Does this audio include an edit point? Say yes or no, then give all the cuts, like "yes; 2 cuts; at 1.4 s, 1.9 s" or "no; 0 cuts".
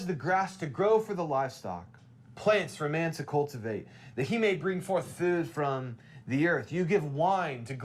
no; 0 cuts